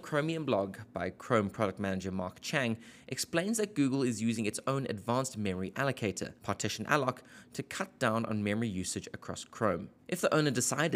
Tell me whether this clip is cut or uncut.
cut